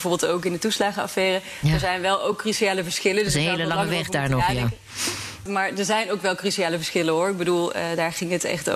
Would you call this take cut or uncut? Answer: cut